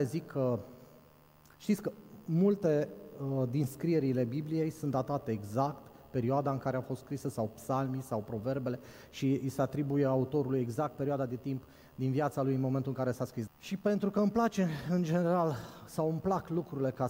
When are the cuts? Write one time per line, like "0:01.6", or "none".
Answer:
0:13.5